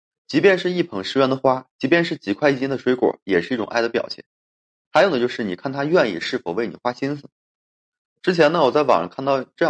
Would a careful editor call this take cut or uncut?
cut